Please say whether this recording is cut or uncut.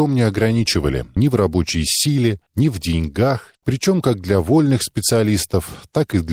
cut